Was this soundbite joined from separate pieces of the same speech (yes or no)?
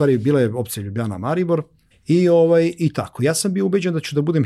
yes